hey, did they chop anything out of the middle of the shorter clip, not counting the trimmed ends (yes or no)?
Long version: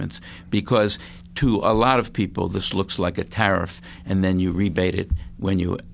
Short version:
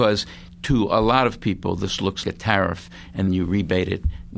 yes